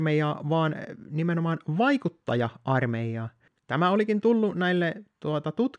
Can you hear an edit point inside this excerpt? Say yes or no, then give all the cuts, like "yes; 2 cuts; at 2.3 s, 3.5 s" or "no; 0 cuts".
yes; 1 cut; at 3.5 s